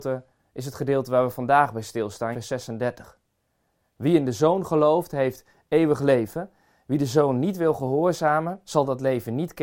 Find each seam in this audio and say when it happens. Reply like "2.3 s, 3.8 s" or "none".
2.3 s